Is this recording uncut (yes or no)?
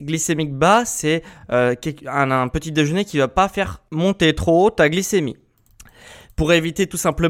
yes